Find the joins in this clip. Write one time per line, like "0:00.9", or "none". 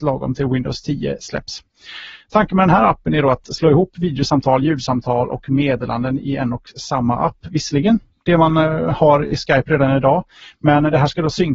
none